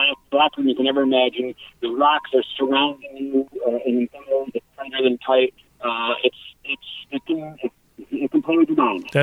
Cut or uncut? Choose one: uncut